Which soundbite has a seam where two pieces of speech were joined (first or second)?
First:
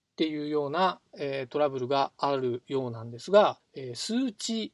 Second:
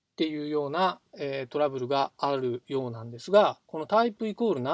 first